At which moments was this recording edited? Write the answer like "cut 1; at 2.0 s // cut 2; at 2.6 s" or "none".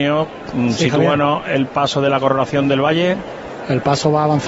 none